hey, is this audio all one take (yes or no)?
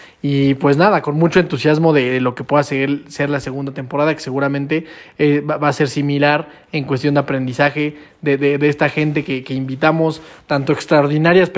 yes